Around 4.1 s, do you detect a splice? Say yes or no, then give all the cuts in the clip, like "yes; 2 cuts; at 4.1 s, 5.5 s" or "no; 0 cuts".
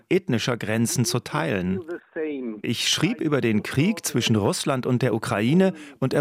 no; 1 cut; at 2.6 s